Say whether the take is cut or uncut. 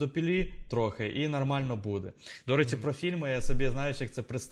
uncut